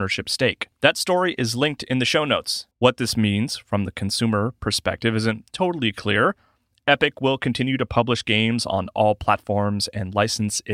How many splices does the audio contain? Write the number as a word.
one